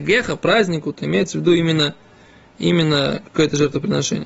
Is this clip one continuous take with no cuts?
yes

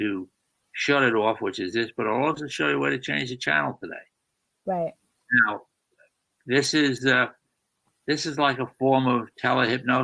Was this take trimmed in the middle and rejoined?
no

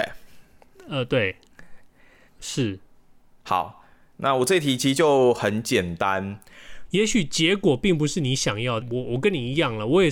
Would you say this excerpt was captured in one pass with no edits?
no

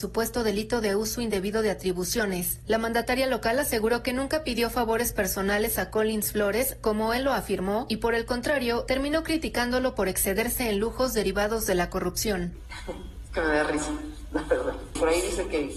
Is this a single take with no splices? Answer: yes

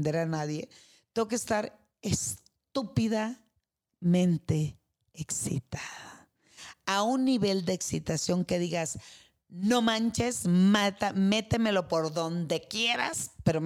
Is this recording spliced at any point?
no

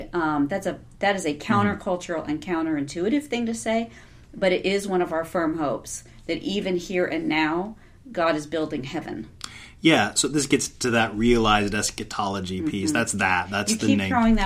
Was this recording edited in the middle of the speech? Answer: no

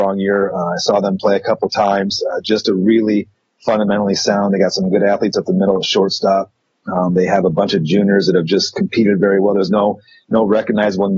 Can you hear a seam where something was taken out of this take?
no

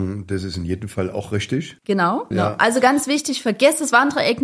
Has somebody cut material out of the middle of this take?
yes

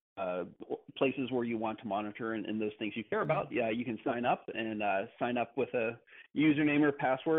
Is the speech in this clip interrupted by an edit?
no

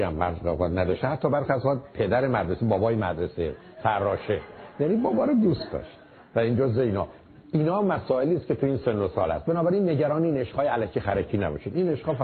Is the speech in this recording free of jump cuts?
yes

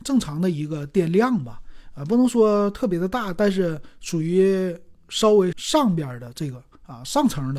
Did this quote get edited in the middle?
yes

